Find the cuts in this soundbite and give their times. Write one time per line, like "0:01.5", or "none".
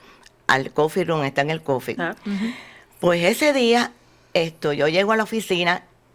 0:02.0